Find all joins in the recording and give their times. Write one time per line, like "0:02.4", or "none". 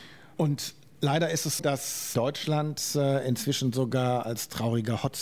0:01.6